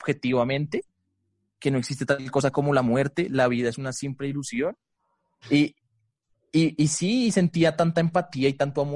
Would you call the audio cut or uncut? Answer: cut